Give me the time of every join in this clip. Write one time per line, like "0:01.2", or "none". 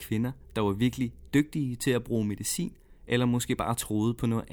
none

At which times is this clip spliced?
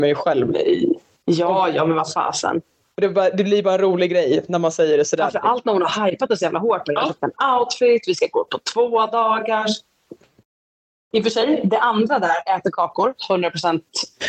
0:10.2

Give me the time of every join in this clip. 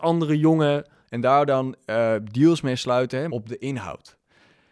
0:01.0
0:03.3

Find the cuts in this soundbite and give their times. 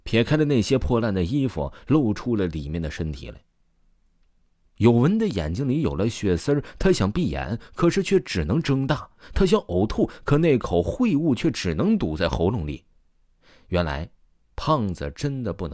none

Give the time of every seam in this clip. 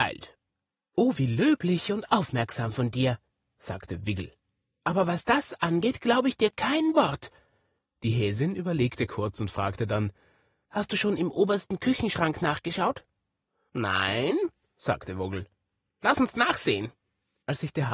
none

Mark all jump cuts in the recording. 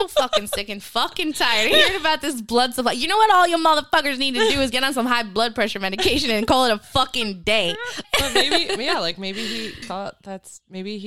0:08.0
0:09.8

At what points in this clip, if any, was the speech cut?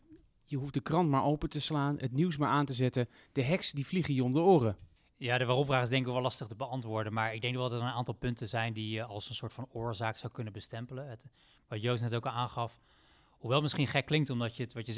none

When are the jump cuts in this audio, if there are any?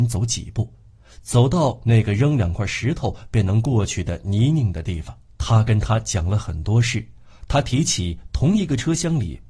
0:05.3

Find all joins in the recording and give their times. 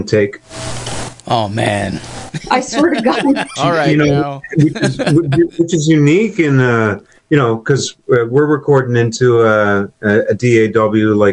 0:03.6

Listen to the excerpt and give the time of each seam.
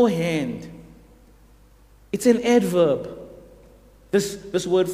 none

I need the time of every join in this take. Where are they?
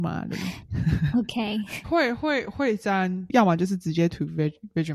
0:01.8

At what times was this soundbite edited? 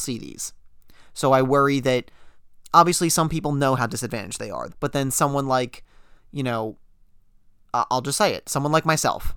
0:04.7

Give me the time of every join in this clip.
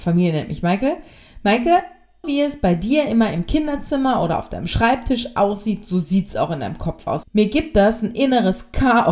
0:02.2
0:07.2

